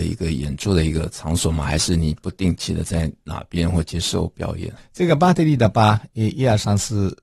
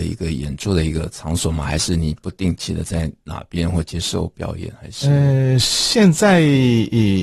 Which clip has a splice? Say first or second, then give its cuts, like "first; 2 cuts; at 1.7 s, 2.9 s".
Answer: first; 1 cut; at 4.8 s